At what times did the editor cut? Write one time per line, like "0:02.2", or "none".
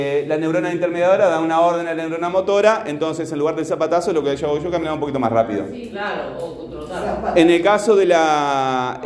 none